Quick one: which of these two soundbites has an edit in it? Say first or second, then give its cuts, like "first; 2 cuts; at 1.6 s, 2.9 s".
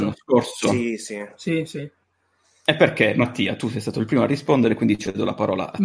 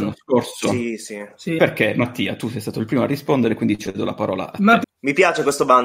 second; 2 cuts; at 1.6 s, 4.8 s